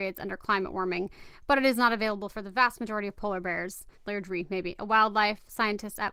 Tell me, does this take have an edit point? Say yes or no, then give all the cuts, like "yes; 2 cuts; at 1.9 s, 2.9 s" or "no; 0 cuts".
yes; 1 cut; at 4.0 s